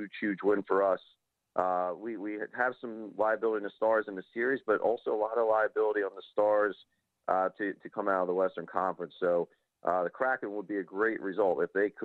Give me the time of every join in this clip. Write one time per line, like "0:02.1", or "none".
none